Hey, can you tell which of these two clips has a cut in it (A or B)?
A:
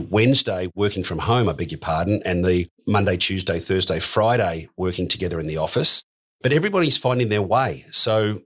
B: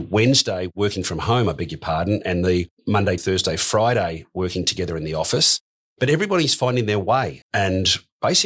B